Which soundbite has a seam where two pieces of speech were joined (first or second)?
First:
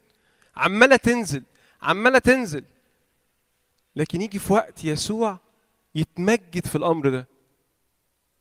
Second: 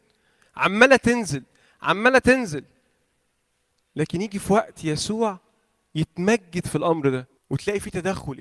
second